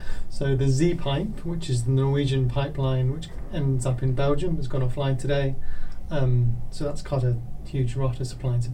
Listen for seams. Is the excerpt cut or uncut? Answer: uncut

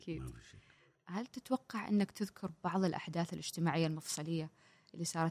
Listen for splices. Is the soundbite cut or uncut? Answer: uncut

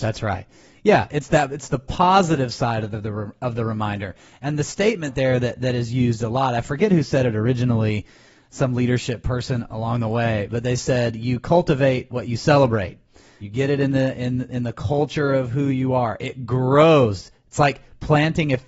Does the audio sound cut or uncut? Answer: cut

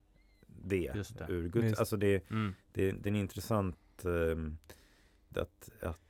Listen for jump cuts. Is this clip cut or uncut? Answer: uncut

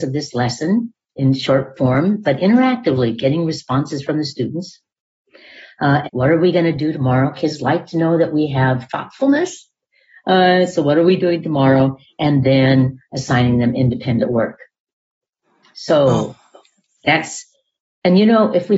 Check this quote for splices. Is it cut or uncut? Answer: cut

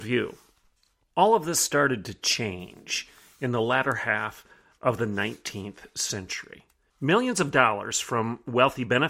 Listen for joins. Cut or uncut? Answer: cut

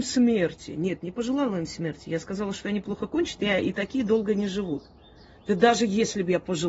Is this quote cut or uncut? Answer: uncut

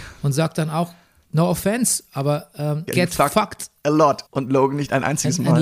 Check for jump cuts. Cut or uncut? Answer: cut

